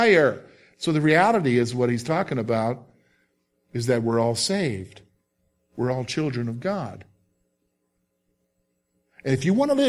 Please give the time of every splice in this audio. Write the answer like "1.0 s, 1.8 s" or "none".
none